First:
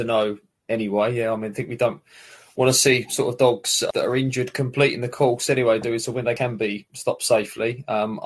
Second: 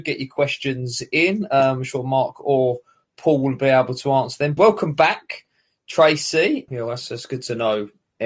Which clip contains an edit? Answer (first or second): second